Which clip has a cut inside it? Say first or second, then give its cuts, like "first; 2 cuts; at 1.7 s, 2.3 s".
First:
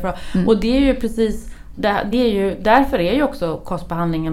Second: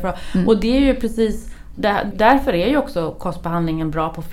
second; 1 cut; at 2.1 s